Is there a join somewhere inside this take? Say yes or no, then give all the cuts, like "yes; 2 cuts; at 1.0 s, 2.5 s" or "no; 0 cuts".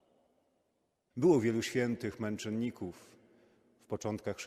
yes; 1 cut; at 1.1 s